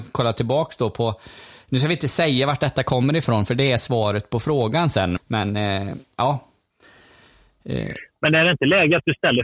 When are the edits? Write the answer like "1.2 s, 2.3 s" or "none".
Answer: 5.2 s

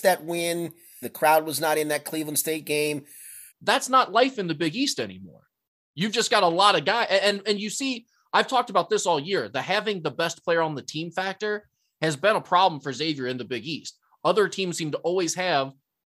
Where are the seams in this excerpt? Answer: 1.0 s, 3.5 s

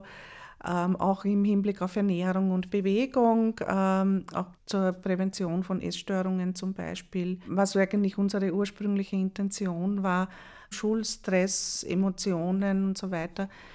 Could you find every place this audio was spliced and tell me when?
4.6 s, 10.7 s

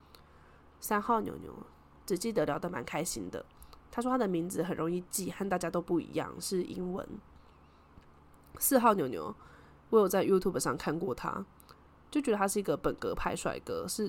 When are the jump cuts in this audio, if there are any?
none

